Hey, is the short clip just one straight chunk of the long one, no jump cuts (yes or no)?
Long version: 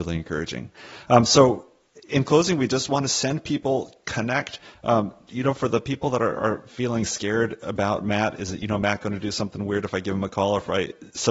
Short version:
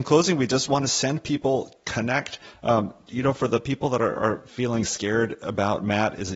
yes